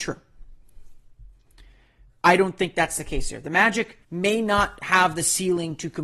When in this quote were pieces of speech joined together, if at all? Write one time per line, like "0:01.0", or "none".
0:02.1
0:04.0